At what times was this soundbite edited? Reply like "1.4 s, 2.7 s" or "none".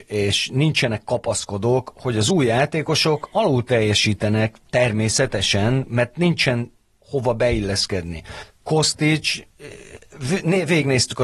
none